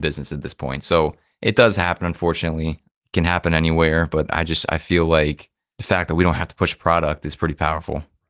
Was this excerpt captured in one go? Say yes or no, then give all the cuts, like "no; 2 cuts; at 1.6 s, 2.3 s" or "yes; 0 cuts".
yes; 0 cuts